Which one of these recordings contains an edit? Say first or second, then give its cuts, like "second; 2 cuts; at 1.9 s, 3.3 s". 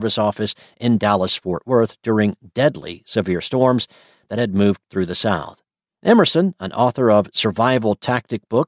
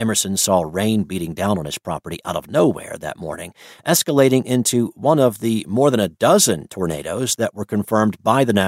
first; 1 cut; at 5.9 s